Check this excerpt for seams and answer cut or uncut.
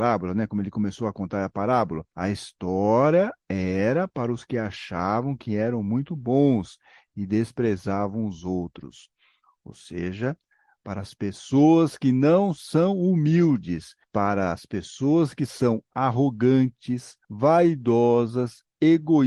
cut